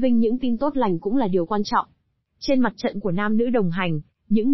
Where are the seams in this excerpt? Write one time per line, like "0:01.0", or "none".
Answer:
none

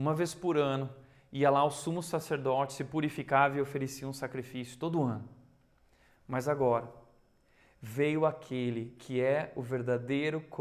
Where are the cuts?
none

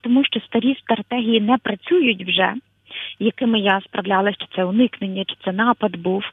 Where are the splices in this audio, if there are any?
0:04.4

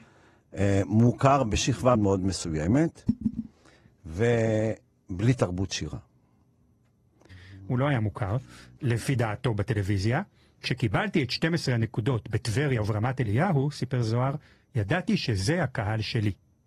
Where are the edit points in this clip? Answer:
0:01.9
0:07.3

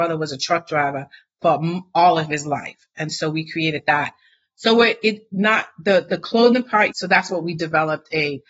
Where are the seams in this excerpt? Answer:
0:06.9

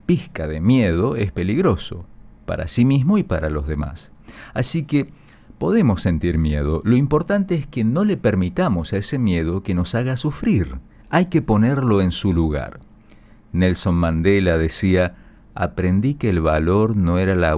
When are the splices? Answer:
none

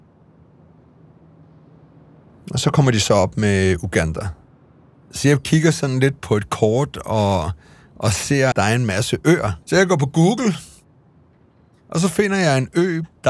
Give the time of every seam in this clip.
0:06.2
0:08.5
0:09.6

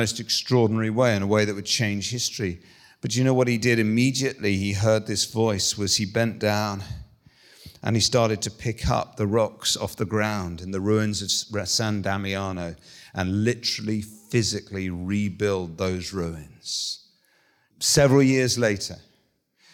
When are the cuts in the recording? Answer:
0:17.7

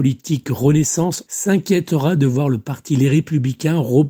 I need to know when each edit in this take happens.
0:01.3

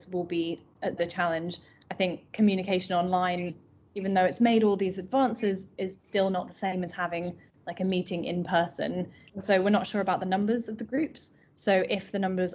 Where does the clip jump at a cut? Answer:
0:01.0

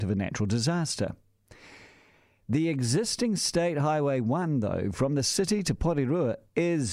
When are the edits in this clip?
none

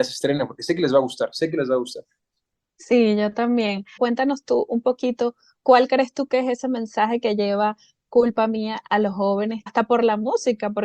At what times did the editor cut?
0:04.0
0:09.7

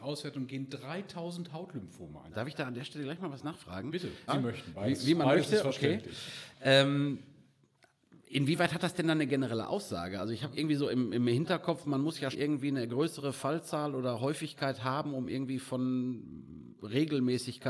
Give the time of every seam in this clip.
0:02.3
0:04.3
0:12.3

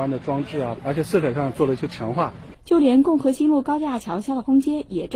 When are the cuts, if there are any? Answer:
0:02.5

